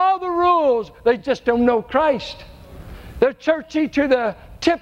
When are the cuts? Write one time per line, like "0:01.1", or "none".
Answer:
none